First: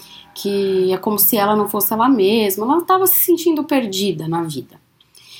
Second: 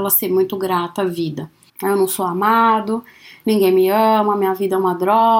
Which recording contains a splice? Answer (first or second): second